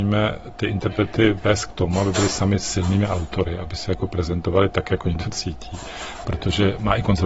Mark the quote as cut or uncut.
cut